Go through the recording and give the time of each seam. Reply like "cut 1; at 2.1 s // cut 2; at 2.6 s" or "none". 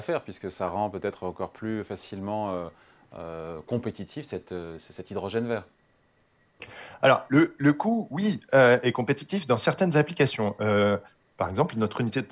none